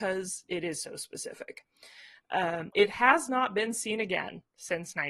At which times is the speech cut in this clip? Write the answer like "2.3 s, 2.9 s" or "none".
2.7 s